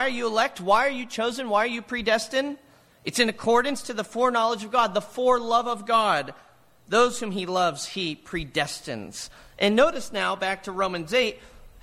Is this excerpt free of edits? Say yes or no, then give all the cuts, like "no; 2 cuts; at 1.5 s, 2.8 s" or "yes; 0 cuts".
yes; 0 cuts